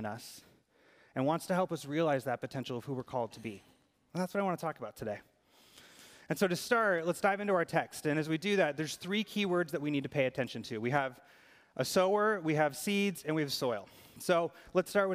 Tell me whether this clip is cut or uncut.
uncut